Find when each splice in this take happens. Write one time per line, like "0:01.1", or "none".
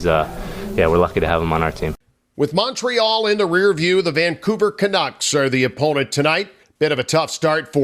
none

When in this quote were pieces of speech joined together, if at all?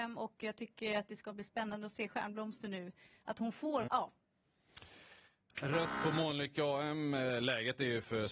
0:03.9

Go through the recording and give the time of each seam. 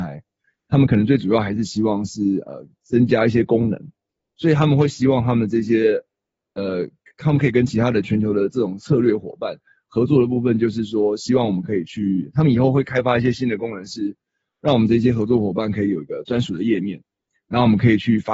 none

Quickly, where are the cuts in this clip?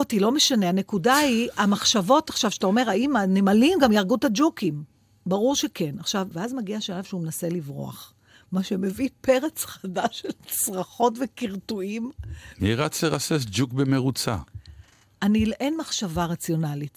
0:06.3

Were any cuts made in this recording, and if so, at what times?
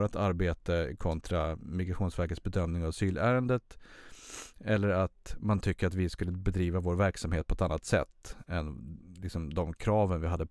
none

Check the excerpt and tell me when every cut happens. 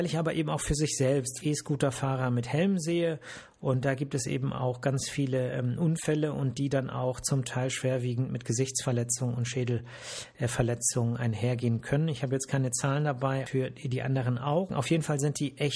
0:01.4
0:13.5
0:14.7

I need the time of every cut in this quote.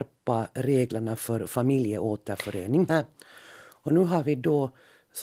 0:02.9

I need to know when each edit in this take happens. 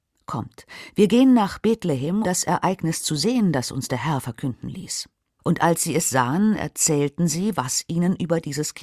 0:02.2
0:05.4

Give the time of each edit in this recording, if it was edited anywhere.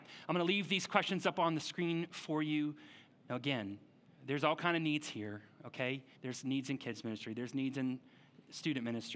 0:03.1
0:06.2

